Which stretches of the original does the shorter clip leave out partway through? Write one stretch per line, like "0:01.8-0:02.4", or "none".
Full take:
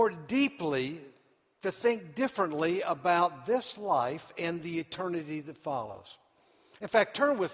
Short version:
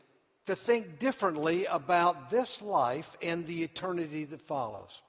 none